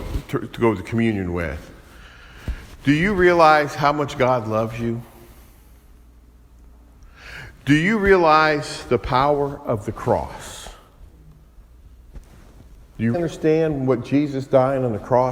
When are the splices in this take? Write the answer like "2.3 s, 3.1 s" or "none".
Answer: 13.1 s